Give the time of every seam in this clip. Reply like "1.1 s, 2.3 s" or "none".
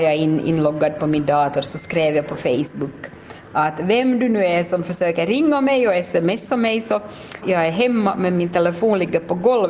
7.4 s